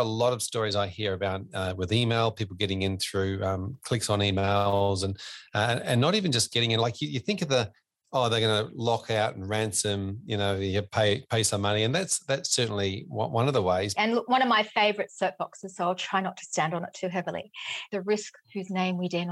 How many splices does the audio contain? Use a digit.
2